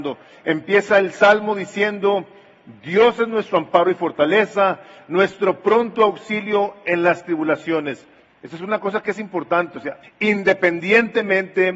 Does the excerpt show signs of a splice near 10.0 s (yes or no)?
yes